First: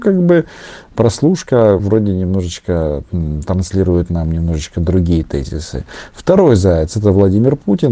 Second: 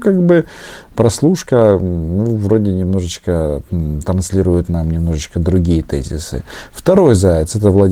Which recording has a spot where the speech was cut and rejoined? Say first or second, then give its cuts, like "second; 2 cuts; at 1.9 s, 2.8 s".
first; 1 cut; at 1.8 s